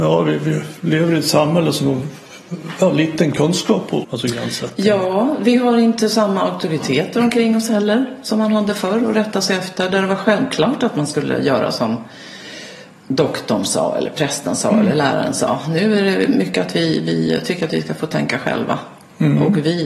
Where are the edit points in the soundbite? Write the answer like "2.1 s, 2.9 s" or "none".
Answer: 4.0 s